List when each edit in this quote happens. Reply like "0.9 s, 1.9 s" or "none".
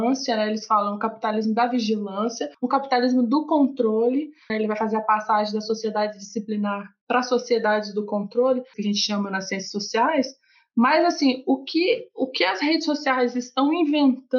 4.5 s, 8.7 s